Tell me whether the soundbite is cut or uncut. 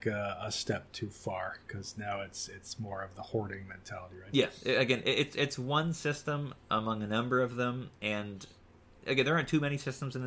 uncut